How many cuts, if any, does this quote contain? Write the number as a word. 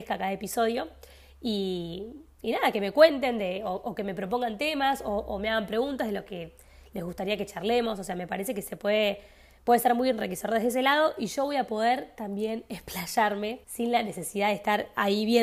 one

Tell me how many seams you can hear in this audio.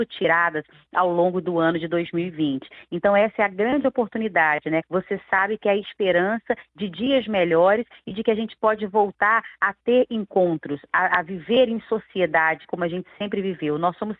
one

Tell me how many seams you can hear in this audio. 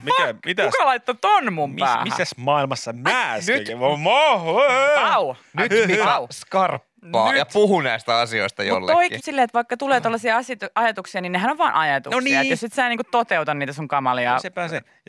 one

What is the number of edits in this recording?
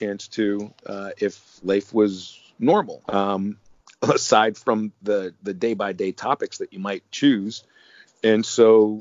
one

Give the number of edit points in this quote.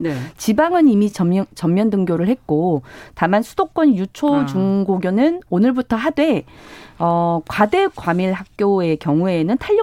zero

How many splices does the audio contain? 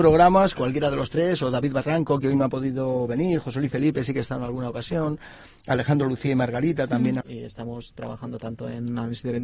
one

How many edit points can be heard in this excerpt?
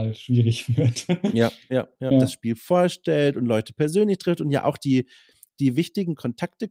one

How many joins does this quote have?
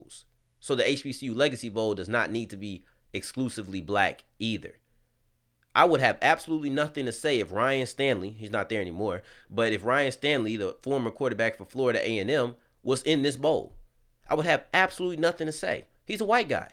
zero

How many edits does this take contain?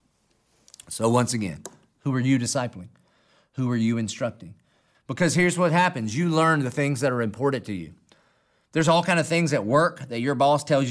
one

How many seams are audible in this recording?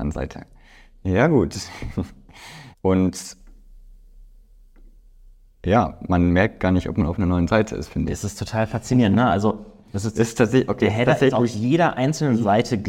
one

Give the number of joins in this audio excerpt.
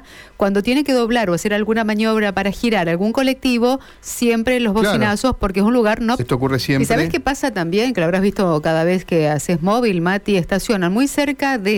one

